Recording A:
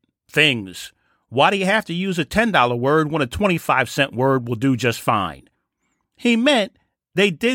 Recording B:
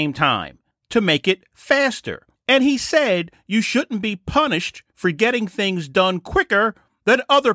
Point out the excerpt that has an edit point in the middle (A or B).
B